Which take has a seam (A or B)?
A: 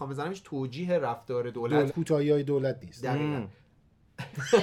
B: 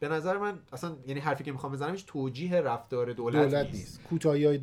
A